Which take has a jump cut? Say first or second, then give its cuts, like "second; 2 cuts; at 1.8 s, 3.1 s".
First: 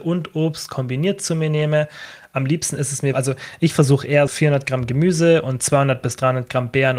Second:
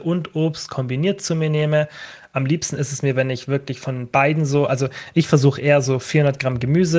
first; 2 cuts; at 3.1 s, 4.3 s